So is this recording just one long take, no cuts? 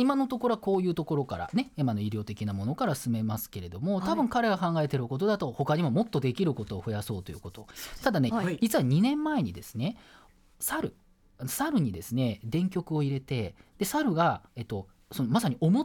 no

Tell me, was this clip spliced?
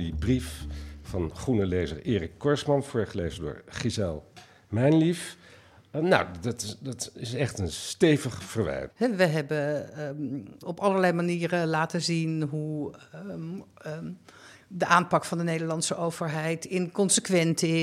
yes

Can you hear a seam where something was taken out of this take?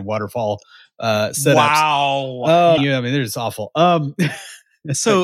yes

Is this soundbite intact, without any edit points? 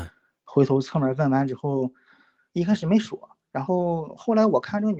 yes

